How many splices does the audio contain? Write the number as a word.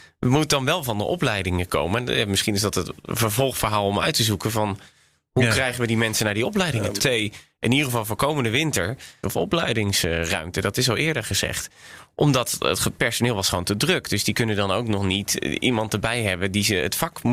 two